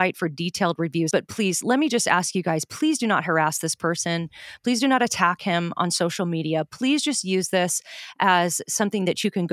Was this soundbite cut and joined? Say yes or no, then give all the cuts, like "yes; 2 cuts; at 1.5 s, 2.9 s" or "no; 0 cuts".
yes; 1 cut; at 1.1 s